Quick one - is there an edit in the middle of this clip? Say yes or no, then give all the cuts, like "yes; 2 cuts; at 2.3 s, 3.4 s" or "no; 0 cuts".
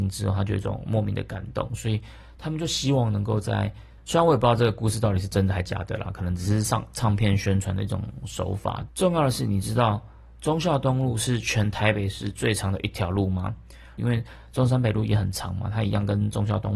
yes; 3 cuts; at 4.0 s, 8.9 s, 14.0 s